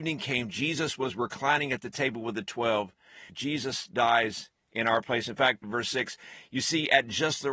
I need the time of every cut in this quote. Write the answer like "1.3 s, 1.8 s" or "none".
3.3 s, 5.6 s